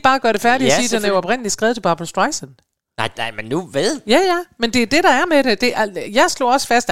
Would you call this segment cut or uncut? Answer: cut